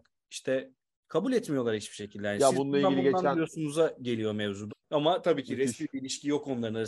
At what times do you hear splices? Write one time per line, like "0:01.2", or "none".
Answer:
0:04.7